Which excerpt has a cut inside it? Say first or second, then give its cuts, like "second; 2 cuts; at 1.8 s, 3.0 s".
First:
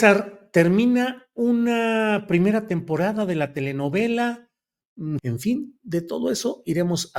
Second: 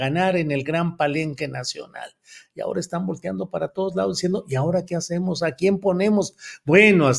first; 1 cut; at 5.2 s